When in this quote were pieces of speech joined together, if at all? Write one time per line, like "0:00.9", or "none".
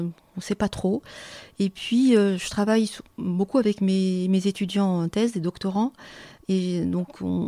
none

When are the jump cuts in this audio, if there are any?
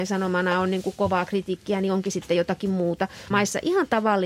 0:03.3

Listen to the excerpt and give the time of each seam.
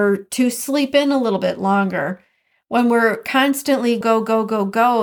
0:04.0

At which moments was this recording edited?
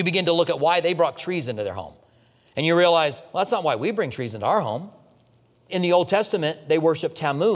none

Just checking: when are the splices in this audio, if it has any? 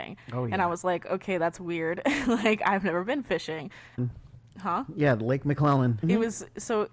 0:04.0
0:06.0

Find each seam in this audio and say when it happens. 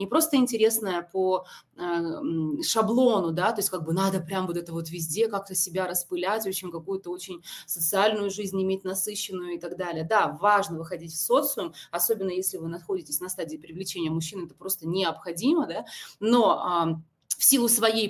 none

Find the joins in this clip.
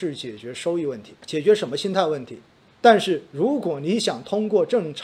0:01.2
0:02.7

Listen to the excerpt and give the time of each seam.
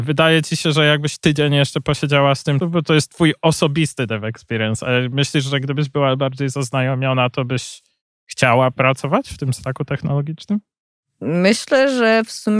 0:02.6

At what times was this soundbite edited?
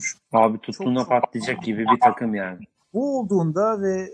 0:02.8

